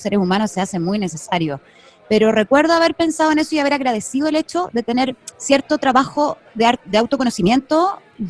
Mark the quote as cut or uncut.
uncut